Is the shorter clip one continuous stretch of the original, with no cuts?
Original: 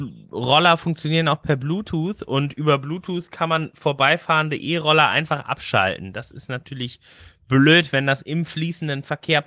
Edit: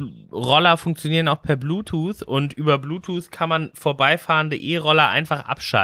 yes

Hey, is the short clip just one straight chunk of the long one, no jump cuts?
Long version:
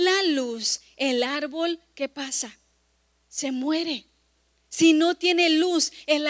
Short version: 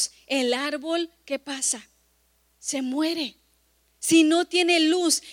yes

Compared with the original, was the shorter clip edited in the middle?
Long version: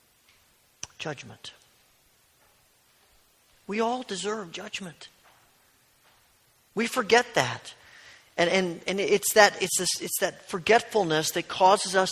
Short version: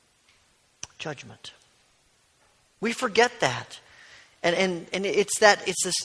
yes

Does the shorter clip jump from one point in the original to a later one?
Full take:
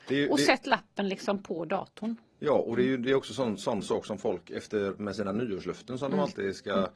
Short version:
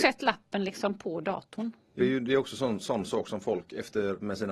yes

